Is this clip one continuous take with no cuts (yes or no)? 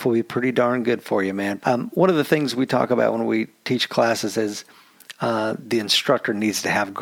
no